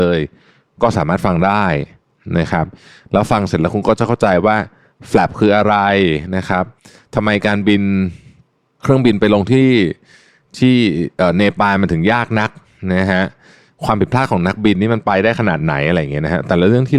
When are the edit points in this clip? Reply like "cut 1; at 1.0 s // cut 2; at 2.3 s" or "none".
cut 1; at 8.8 s